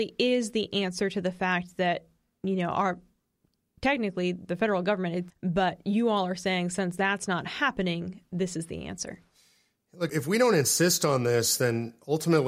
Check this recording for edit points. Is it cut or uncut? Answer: cut